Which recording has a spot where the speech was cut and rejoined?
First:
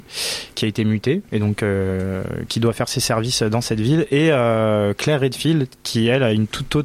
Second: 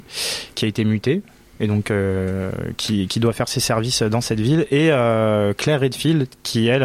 first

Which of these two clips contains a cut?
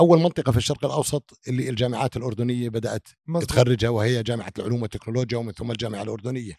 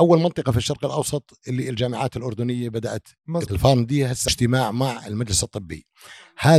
second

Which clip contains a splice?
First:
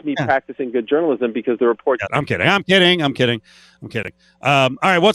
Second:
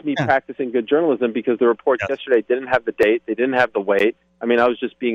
first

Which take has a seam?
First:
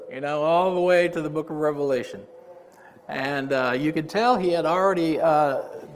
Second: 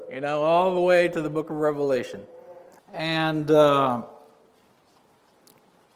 second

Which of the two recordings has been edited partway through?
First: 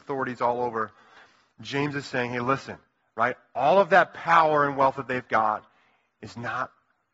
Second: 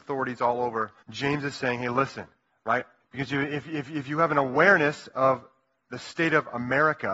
second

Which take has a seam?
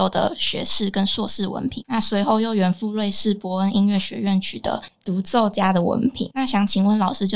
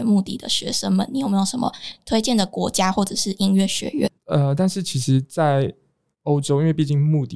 second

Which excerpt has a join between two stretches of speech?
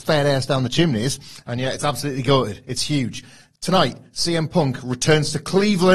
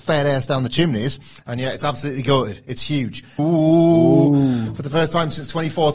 second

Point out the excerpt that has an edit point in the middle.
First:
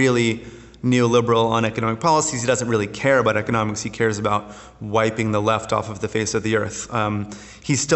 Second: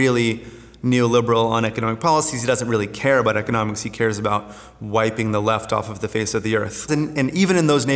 second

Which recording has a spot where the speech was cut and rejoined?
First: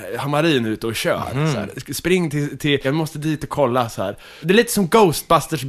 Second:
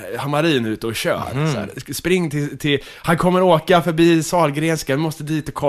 first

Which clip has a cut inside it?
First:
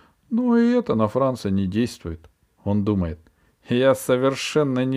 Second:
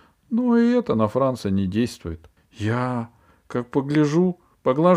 second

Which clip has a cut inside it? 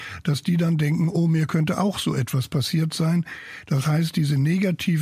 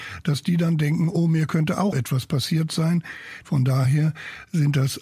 second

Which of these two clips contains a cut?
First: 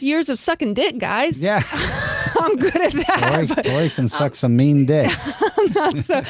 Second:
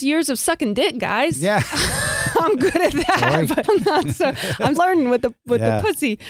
second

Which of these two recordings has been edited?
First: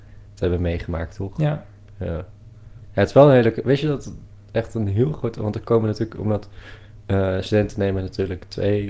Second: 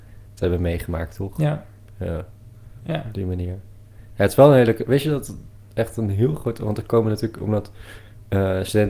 first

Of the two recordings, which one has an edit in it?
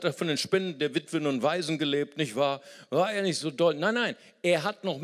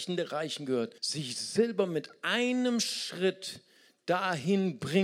second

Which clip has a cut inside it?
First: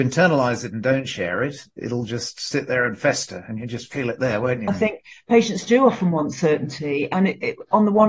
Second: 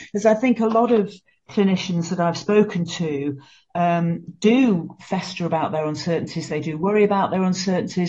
first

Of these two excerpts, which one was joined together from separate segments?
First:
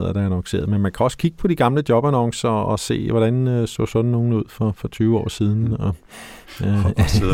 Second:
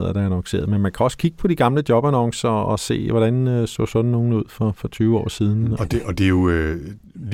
second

